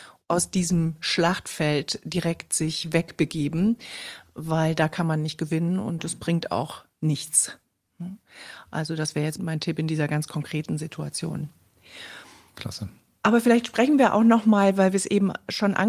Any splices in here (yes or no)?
no